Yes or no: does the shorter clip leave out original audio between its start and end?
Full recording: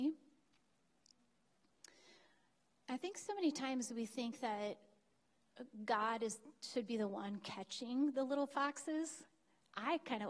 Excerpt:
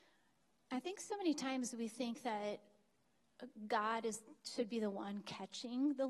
no